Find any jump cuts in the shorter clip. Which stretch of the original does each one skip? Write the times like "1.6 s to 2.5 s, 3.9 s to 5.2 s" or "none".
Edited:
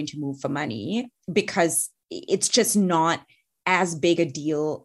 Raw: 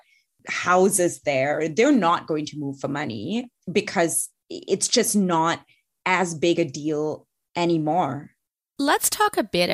none